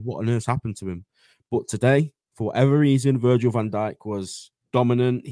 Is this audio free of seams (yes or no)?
yes